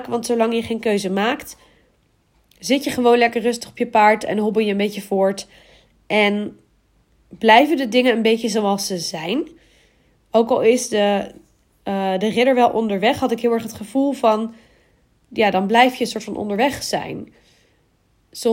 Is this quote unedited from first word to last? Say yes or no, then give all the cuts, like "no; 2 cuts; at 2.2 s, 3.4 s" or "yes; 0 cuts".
yes; 0 cuts